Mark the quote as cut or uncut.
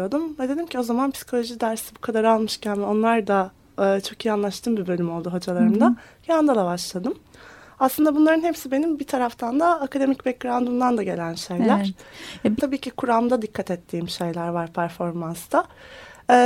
cut